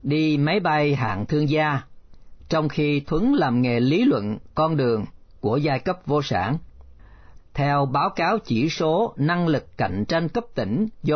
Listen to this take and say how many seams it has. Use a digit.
2